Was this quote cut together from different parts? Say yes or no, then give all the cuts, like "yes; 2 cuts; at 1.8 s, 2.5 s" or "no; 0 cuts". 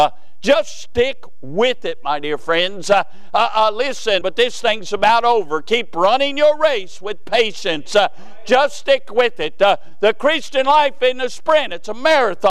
yes; 1 cut; at 4.2 s